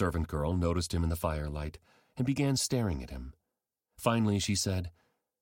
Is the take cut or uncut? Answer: uncut